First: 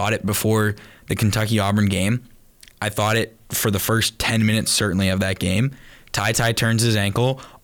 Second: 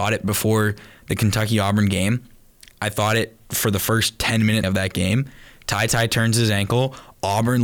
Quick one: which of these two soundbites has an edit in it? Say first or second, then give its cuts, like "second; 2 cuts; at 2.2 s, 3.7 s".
second; 1 cut; at 4.6 s